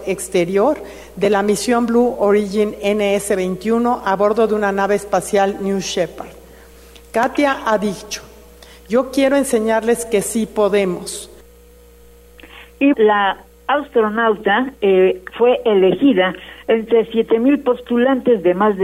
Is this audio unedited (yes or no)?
no